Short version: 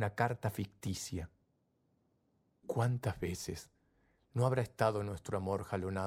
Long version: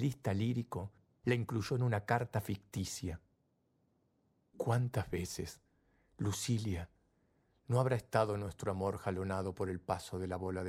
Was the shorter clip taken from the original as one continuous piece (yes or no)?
no